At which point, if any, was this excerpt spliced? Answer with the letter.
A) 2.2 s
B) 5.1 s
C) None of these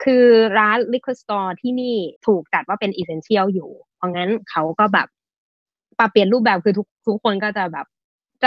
A